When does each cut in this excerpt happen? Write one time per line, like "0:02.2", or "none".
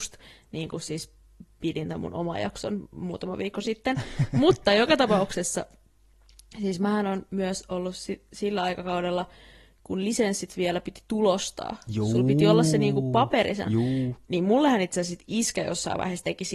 none

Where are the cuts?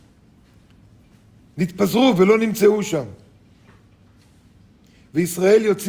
none

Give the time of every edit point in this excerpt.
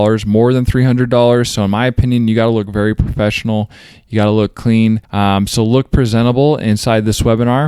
0:05.0

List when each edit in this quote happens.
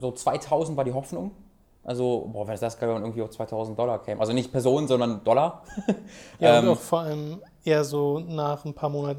none

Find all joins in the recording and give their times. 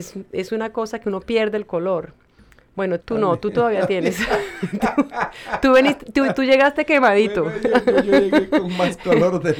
0:03.0

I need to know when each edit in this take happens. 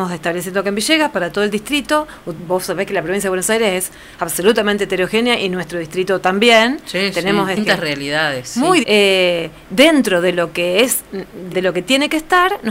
0:07.6
0:08.8
0:11.5

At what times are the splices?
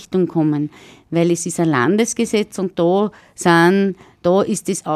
none

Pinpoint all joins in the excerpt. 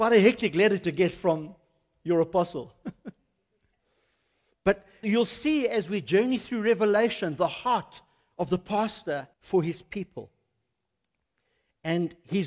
0:05.0
0:09.3

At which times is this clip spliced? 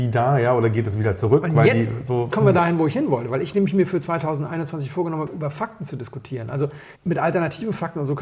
0:05.3
0:07.0

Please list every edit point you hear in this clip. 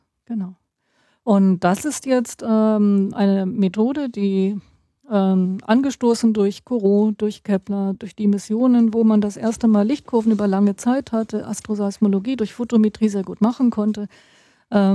0:03.1
0:07.9

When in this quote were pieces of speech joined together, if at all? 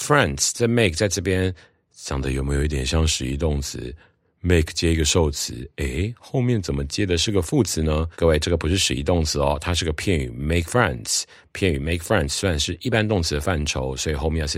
0:08.1

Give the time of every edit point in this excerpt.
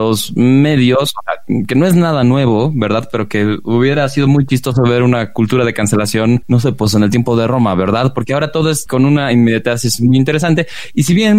none

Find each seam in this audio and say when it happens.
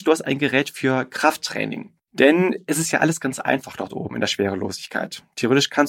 0:02.1

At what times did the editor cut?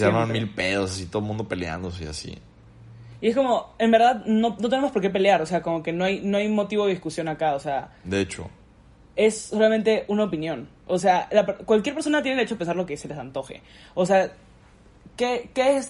none

